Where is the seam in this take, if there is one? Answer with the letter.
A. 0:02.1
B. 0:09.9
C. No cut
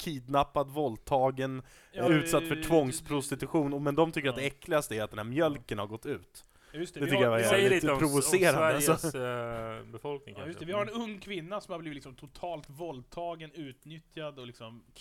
A